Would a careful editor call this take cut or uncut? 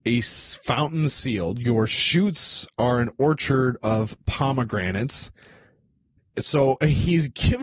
uncut